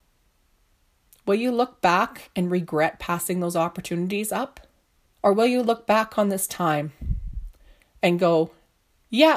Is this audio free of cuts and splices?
no; 1 cut; at 5.1 s

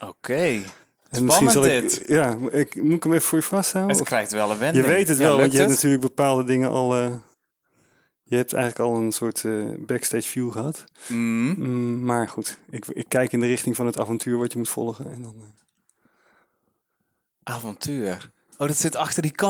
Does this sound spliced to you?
no; 0 cuts

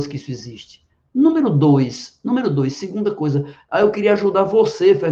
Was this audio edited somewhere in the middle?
no; 0 cuts

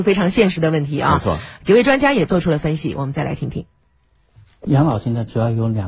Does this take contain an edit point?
no; 0 cuts

